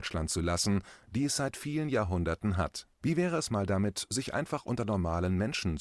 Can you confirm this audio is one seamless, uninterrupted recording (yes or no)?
no